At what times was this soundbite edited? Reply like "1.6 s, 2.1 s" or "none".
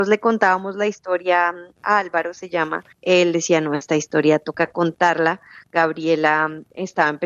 2.9 s